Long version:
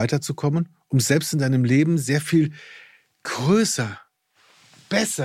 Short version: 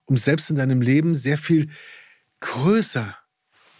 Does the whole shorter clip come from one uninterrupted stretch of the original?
yes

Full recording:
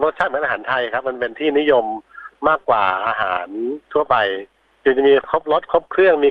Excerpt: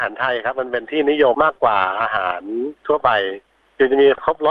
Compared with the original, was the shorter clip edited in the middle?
yes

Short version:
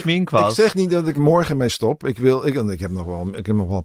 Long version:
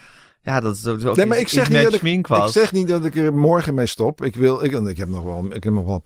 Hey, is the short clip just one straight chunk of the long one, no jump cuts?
no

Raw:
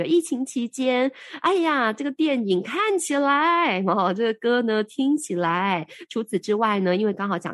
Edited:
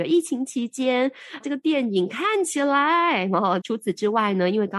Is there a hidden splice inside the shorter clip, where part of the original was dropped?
yes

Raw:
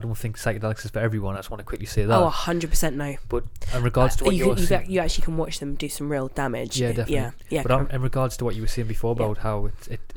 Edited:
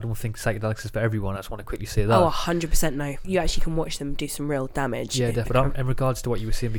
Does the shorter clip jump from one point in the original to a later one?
yes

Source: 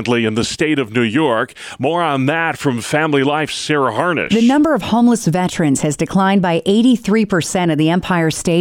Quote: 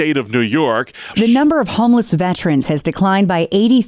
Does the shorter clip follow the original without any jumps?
no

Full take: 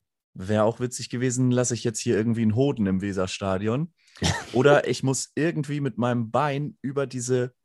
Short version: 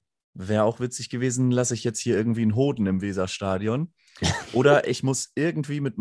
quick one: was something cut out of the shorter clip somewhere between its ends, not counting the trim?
no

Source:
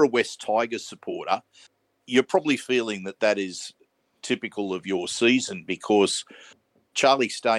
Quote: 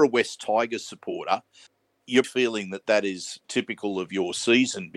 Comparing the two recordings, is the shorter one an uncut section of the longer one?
no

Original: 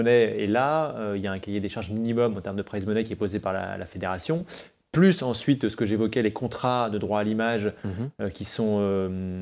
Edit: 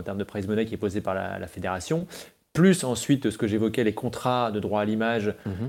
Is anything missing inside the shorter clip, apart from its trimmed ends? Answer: no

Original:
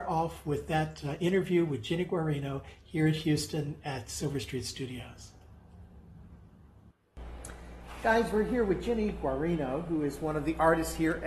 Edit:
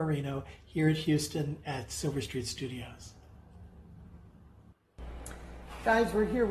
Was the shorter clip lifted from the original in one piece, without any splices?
yes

